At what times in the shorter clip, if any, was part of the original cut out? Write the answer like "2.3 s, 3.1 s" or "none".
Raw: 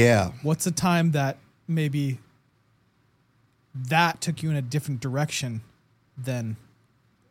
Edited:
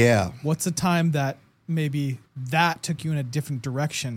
2.2 s